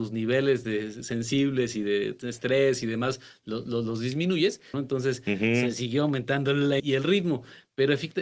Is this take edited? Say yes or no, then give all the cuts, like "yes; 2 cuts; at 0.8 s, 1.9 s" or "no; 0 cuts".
yes; 2 cuts; at 4.7 s, 6.8 s